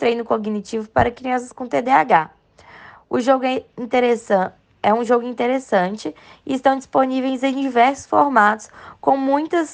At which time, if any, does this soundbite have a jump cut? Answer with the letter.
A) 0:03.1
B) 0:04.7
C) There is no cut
C